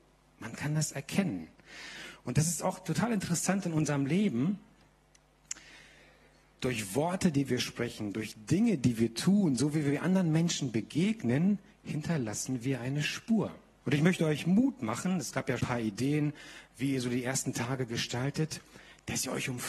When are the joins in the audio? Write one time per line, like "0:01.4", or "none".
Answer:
0:13.8
0:15.6

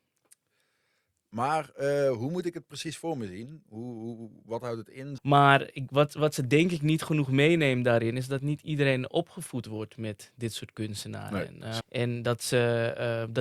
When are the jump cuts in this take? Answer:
0:05.2
0:11.8

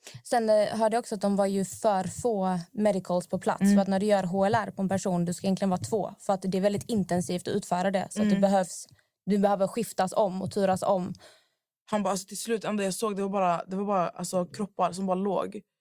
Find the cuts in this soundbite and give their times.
0:11.8

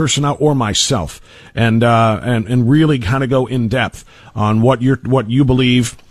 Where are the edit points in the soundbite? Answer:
none

